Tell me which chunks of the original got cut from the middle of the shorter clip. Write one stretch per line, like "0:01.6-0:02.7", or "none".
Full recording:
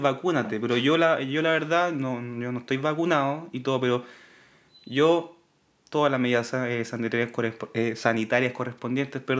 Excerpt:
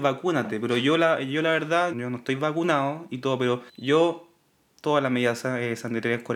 0:01.9-0:02.3
0:04.1-0:04.8